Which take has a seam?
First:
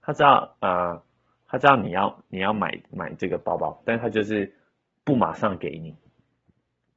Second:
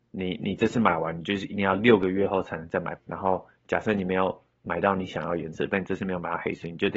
second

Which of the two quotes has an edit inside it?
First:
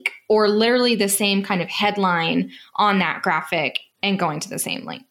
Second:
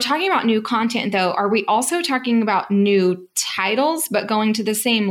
first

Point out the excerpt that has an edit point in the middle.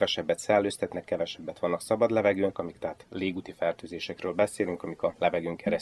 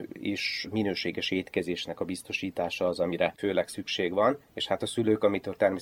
first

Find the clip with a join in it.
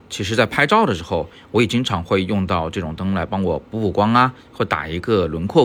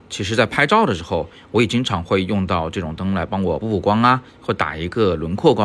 second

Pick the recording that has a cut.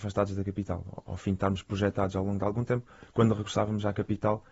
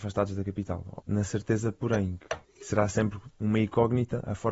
second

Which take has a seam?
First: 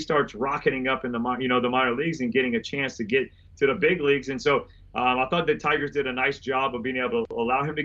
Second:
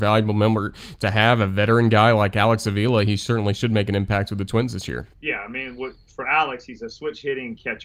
second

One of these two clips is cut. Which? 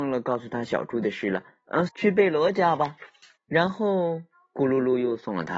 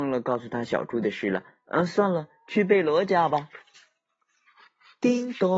first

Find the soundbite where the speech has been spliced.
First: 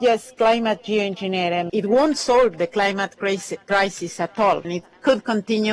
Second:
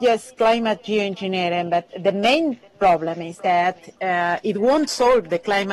first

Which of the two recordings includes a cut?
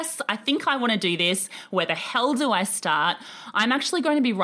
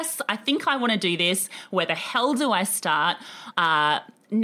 second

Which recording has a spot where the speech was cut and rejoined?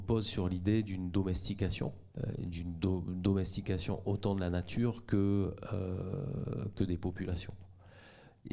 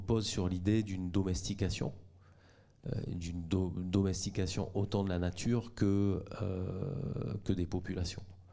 first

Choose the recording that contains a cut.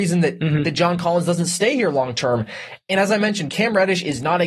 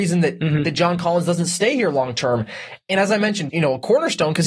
second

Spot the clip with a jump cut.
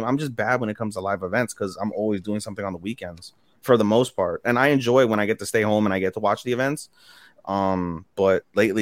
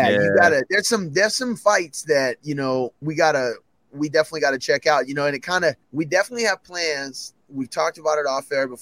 second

